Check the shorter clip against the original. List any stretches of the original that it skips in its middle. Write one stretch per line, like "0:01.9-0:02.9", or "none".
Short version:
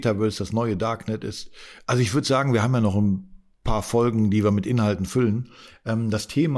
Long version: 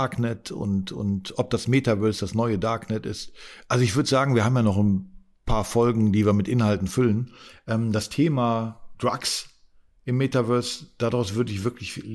none